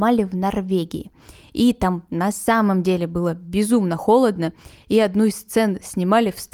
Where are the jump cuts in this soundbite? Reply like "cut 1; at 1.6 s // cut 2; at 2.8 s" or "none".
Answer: none